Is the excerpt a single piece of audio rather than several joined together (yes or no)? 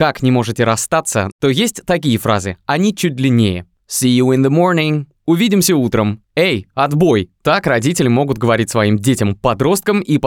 no